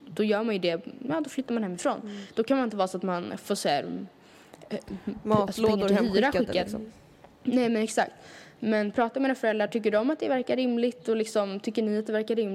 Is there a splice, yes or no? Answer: no